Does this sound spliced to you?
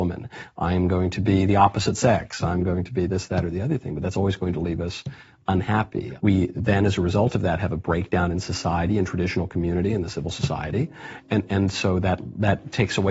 no; 0 cuts

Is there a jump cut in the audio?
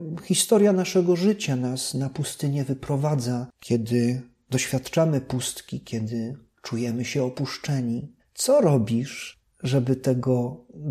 yes; 1 cut; at 8.2 s

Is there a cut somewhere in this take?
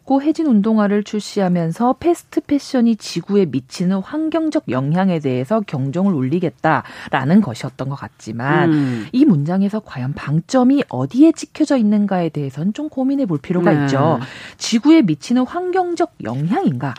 no; 0 cuts

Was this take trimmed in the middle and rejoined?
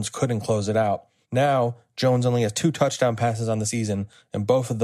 no; 0 cuts

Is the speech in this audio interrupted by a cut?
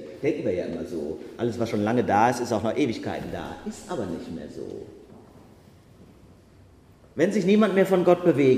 no; 0 cuts

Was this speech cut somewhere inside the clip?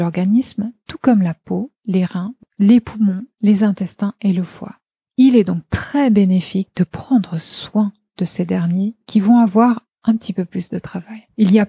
no; 0 cuts

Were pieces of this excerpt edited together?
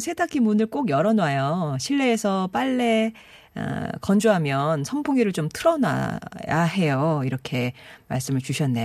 no; 0 cuts

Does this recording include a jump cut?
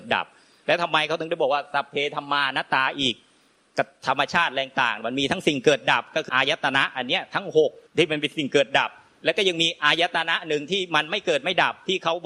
yes; 2 cuts; at 6.3 s, 7.9 s

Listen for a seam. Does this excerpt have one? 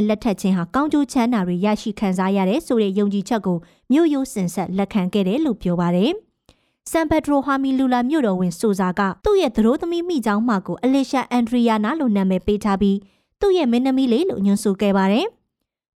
yes; 1 cut; at 9.2 s

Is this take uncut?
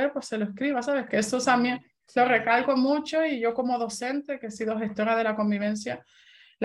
no; 1 cut; at 1.1 s

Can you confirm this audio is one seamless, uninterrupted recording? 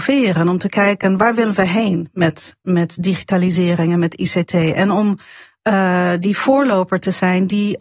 yes; 0 cuts

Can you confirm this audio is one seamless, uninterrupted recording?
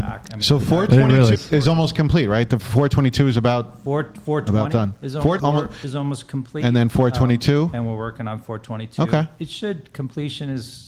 no; 2 cuts; at 1.4 s, 5.4 s

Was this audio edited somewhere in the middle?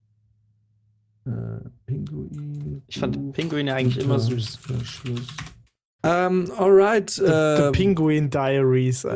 yes; 1 cut; at 6.0 s

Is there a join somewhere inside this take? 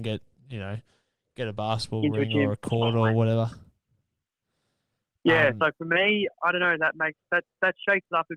no; 0 cuts

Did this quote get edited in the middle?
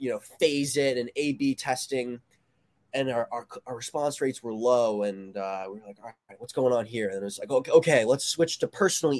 no; 0 cuts

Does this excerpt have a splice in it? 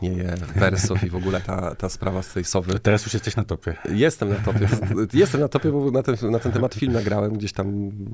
no; 0 cuts

